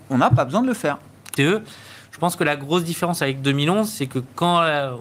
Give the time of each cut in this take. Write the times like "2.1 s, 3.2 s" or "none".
1.4 s